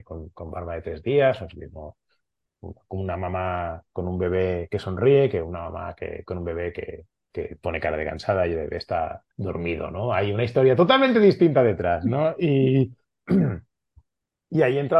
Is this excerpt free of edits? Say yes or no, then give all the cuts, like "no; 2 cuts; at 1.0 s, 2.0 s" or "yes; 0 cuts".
no; 1 cut; at 9.3 s